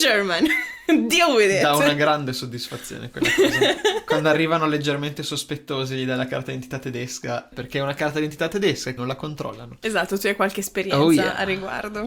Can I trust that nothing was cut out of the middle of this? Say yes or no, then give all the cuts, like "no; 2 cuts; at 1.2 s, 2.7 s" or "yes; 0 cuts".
no; 2 cuts; at 7.5 s, 9.0 s